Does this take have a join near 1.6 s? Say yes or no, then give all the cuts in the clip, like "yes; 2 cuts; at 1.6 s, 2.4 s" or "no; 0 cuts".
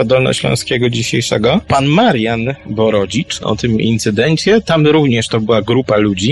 no; 1 cut; at 3.4 s